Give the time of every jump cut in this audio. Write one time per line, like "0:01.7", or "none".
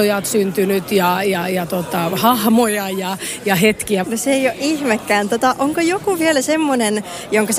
0:04.0